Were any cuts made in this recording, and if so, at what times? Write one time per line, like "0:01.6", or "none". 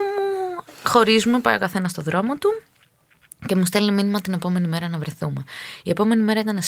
none